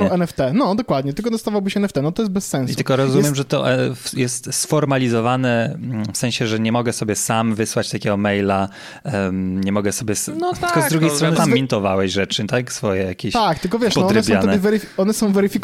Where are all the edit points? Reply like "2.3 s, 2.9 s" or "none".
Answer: 11.4 s